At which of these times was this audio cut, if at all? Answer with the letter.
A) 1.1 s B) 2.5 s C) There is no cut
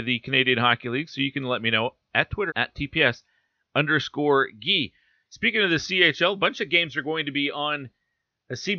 B